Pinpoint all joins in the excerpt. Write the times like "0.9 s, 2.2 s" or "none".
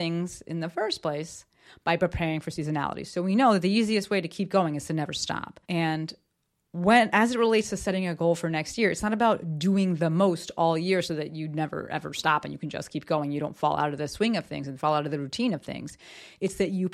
5.6 s